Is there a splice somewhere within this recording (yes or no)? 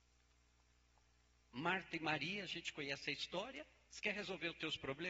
yes